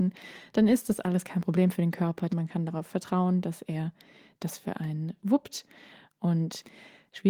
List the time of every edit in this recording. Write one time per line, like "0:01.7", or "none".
0:02.3
0:05.2